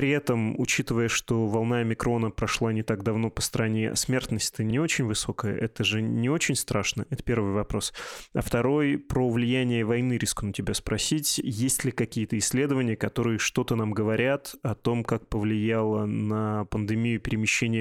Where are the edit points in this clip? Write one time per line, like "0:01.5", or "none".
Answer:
none